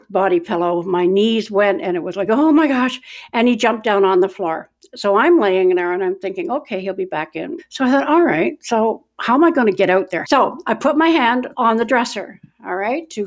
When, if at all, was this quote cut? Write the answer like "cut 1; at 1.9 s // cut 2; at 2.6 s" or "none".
cut 1; at 7.6 s // cut 2; at 10.2 s // cut 3; at 11.5 s